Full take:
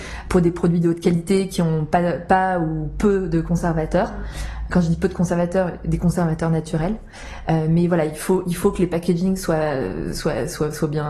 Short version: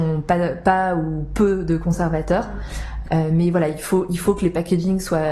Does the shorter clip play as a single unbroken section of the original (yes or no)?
no